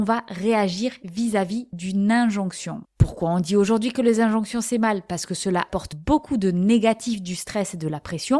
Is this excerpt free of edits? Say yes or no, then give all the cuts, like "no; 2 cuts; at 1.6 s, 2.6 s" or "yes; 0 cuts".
yes; 0 cuts